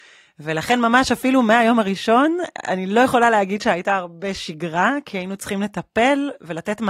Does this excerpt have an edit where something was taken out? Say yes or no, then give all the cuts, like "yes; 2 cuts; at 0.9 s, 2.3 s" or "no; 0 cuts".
no; 0 cuts